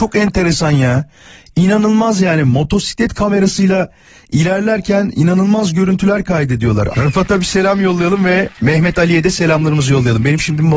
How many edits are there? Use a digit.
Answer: 2